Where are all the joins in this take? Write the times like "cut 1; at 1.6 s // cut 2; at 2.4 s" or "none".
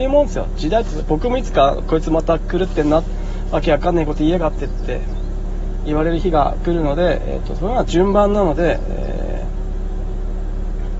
none